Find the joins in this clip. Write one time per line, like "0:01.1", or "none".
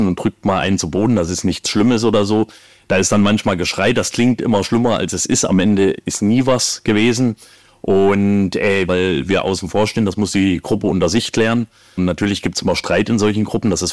0:08.9
0:12.0